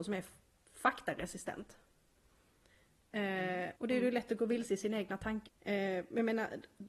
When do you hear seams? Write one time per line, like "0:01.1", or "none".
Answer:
0:03.7
0:05.5